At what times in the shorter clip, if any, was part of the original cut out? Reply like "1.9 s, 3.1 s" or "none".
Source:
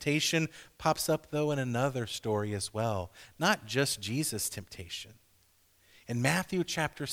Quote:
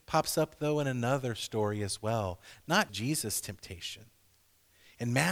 2.9 s